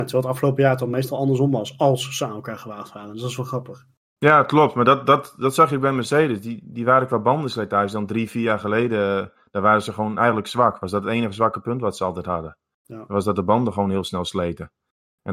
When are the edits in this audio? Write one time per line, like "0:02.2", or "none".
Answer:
none